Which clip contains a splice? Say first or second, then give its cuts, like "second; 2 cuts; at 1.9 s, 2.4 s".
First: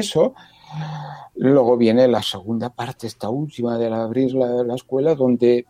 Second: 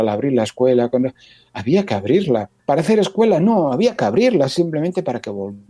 second; 1 cut; at 2.6 s